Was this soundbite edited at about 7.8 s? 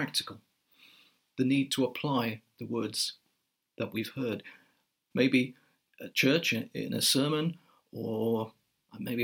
no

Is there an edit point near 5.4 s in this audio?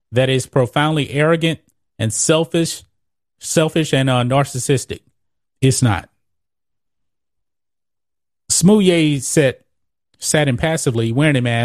yes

